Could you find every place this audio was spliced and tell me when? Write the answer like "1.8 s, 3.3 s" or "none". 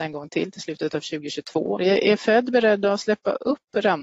1.8 s